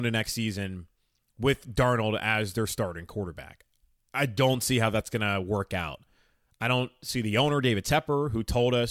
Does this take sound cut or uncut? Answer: uncut